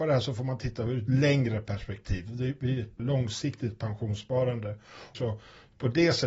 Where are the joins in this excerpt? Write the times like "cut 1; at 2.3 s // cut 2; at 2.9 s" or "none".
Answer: cut 1; at 3.0 s // cut 2; at 5.1 s

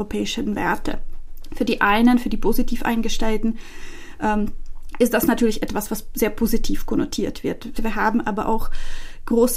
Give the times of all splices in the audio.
cut 1; at 7.8 s

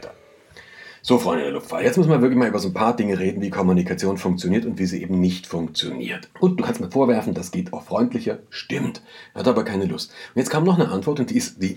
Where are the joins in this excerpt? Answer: cut 1; at 6.3 s

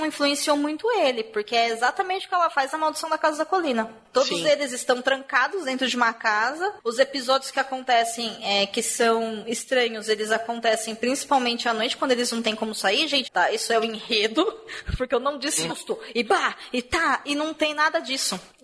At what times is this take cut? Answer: cut 1; at 13.2 s // cut 2; at 15.7 s

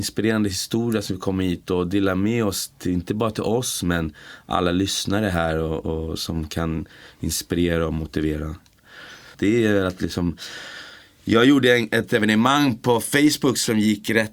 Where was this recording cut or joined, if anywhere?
cut 1; at 9.3 s

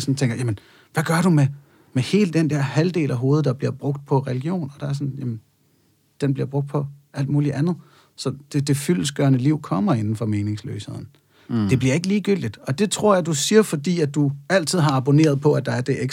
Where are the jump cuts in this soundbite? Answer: cut 1; at 11.4 s // cut 2; at 12.8 s

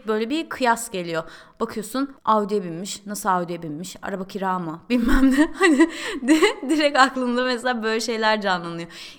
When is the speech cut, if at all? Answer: none

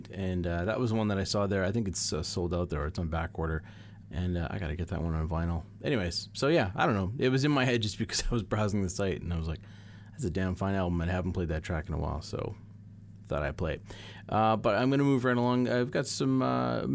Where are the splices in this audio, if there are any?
cut 1; at 4.0 s

